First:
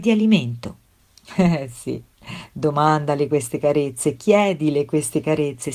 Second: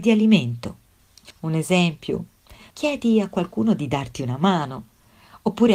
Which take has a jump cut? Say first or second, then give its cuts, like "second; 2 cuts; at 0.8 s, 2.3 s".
second; 2 cuts; at 1.3 s, 2.7 s